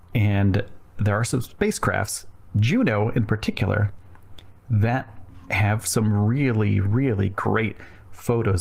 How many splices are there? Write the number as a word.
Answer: zero